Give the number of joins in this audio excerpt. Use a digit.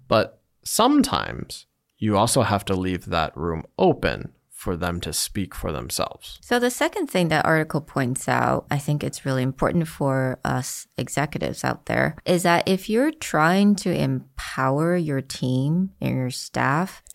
1